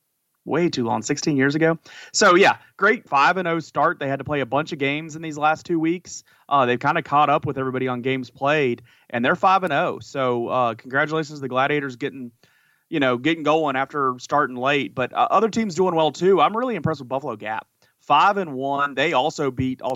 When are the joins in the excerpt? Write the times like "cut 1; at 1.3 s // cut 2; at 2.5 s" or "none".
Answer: cut 1; at 3.1 s